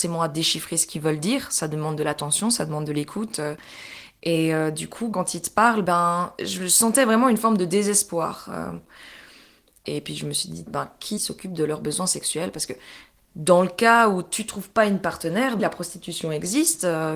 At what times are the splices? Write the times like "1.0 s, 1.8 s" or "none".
10.7 s, 15.6 s

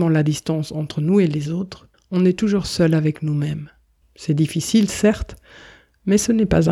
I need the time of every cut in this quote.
1.9 s, 4.0 s

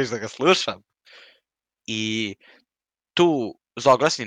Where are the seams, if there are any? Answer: none

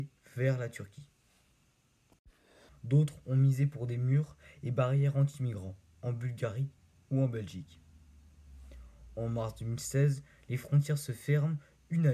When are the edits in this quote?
2.7 s, 5.9 s

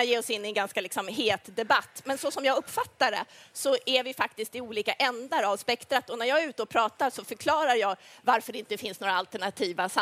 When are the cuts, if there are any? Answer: none

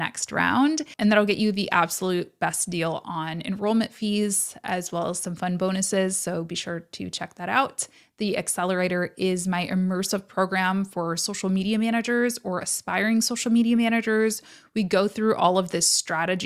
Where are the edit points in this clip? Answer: none

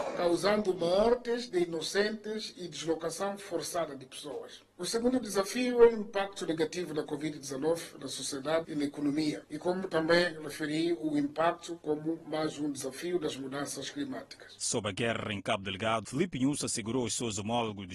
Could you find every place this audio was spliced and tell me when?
16.0 s

